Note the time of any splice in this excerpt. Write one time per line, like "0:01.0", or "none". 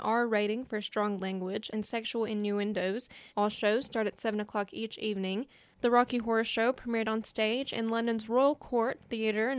0:01.7
0:03.3
0:05.6

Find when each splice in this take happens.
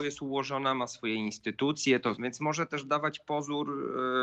0:02.2

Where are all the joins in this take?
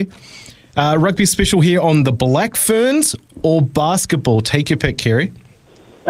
0:03.3

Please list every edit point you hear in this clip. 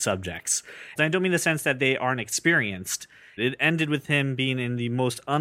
0:01.0
0:03.4

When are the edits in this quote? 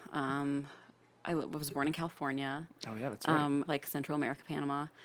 0:03.7

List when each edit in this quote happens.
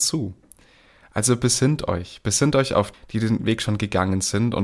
0:02.9

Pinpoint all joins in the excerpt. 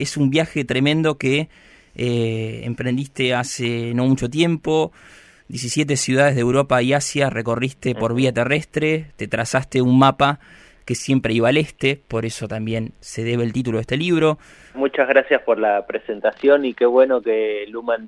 0:14.7

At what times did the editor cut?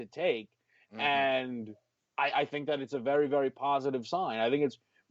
none

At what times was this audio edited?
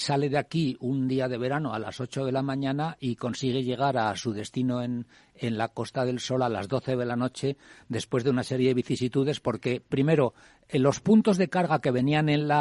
none

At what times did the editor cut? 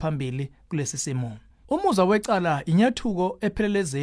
0:01.5

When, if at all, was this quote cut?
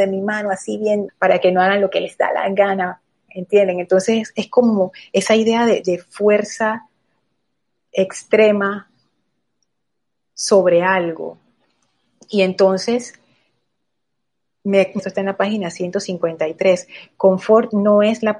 0:01.1
0:03.3
0:15.0

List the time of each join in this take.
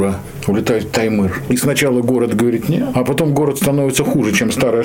0:01.5
0:02.6

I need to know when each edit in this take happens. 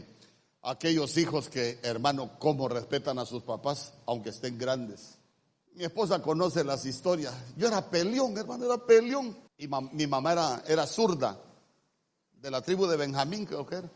0:05.7
0:09.5
0:10.6

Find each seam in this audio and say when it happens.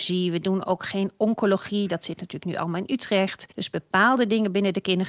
0:03.5

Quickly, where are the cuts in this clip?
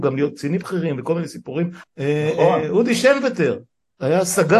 0:01.8

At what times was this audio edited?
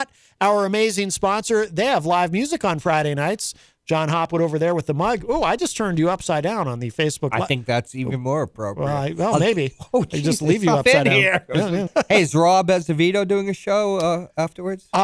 0:11.9

